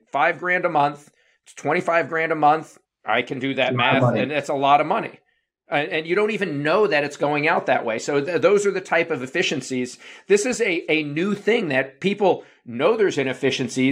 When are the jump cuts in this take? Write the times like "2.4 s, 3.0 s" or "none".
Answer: 2.8 s